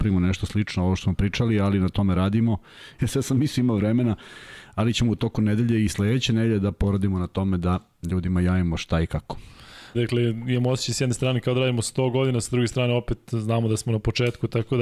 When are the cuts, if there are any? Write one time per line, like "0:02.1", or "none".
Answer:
0:03.0
0:09.9